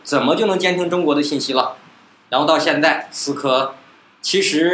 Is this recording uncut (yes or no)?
no